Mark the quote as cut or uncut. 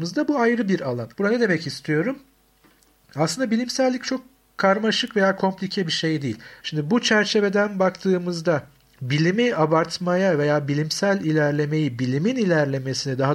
cut